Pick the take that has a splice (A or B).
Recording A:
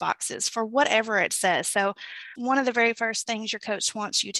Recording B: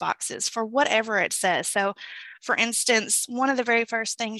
A